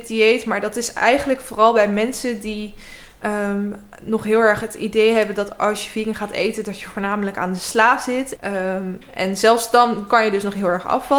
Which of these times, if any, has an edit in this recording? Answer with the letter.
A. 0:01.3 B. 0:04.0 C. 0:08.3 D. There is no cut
C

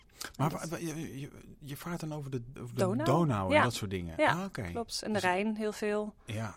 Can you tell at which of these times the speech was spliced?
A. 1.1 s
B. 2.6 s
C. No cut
B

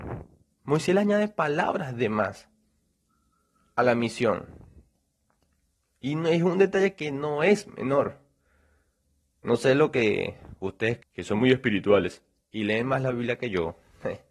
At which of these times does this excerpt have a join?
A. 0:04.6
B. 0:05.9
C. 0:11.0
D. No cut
C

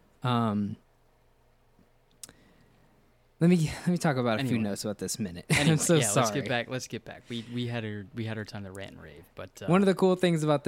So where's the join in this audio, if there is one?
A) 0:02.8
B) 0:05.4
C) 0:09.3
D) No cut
D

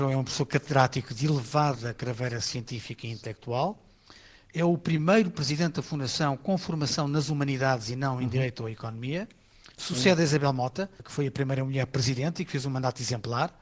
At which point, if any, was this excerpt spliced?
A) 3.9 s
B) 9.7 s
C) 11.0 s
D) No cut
D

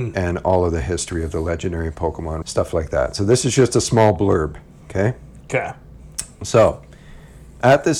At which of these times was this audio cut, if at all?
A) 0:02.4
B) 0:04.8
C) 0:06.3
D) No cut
A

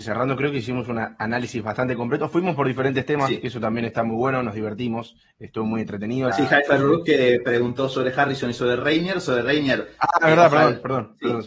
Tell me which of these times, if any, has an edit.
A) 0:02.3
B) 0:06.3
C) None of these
B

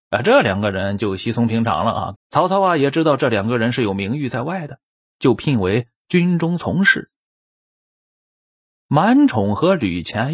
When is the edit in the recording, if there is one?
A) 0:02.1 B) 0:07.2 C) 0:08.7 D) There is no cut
A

